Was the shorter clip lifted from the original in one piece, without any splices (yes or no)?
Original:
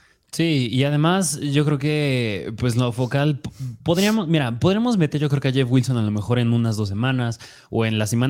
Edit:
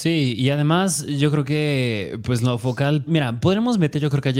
no